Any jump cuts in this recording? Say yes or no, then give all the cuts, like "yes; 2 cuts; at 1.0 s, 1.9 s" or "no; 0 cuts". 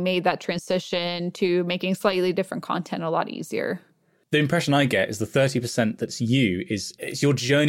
no; 0 cuts